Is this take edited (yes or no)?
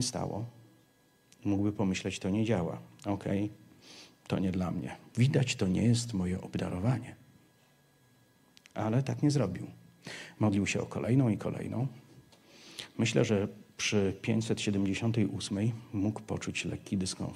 no